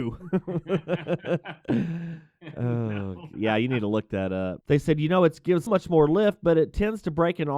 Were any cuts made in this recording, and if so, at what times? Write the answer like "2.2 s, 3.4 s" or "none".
3.3 s, 4.6 s, 5.7 s

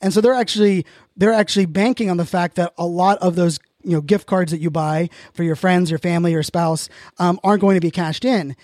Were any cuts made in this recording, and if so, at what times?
none

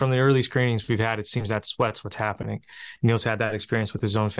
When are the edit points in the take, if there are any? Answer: none

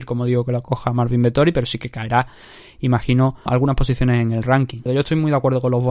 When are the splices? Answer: 3.5 s, 4.9 s

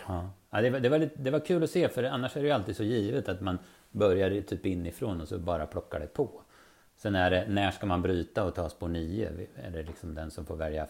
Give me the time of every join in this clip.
none

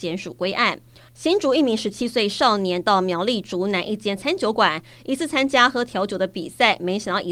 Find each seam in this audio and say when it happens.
1.1 s

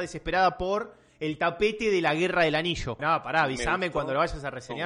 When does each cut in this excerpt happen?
3.0 s

